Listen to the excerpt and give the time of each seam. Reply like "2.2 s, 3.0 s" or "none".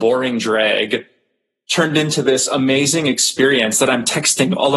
none